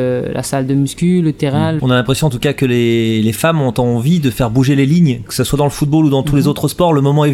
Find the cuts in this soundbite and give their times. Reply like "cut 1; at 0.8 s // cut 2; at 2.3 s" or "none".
cut 1; at 1.8 s

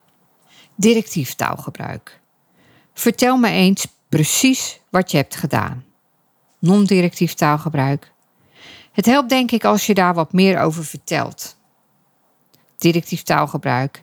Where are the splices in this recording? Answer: none

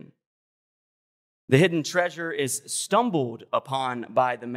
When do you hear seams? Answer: cut 1; at 1.3 s

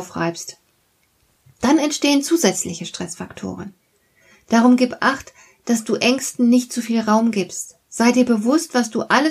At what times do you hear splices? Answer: none

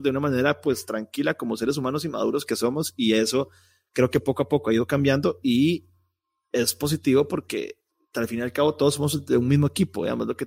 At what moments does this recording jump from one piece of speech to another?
none

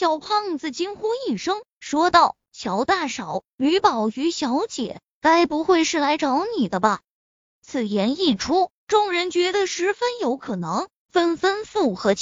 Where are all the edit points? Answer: none

